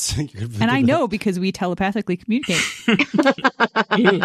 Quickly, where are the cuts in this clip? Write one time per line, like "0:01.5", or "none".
none